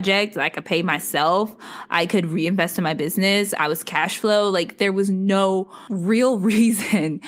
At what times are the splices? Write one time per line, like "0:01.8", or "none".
0:03.6

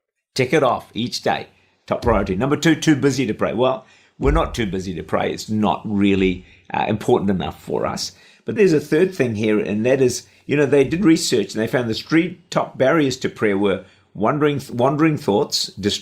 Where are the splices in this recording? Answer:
0:05.5
0:08.6

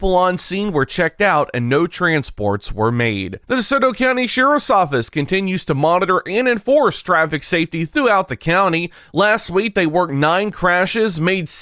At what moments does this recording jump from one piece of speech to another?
0:03.4

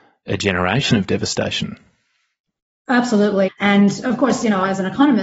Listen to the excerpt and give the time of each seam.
0:03.5

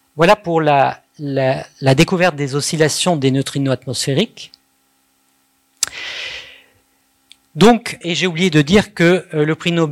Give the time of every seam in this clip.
0:08.0

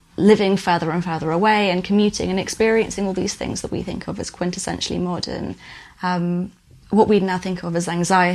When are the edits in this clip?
0:05.9

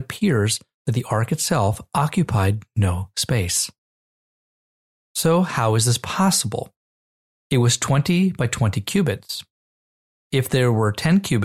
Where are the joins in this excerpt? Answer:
0:07.4

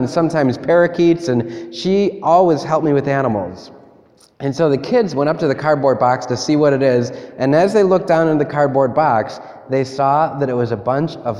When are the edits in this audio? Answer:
0:04.3

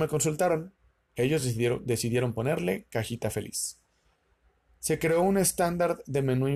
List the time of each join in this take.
none

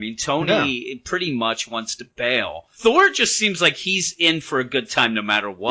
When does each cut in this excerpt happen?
0:02.7

